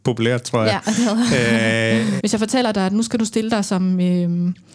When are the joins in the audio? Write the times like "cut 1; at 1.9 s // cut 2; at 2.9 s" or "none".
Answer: cut 1; at 2.2 s